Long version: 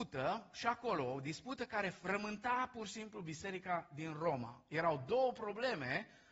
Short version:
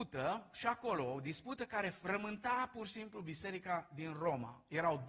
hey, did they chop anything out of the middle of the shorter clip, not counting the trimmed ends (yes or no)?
no